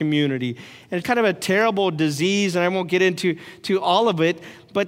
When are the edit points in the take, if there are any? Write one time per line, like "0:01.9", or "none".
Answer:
0:01.0